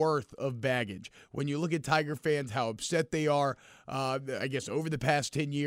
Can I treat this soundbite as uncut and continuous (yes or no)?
yes